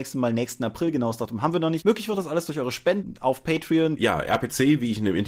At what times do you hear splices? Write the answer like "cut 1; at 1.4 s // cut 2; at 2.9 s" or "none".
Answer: cut 1; at 1.8 s // cut 2; at 4.0 s